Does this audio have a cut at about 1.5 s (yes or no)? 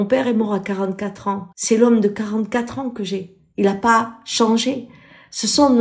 yes